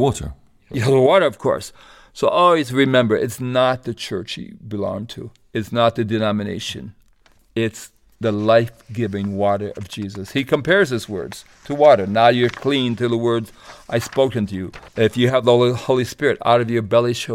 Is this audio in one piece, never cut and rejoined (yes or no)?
no